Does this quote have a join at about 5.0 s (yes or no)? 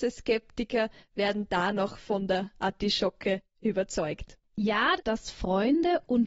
yes